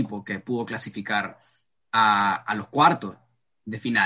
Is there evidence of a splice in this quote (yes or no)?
no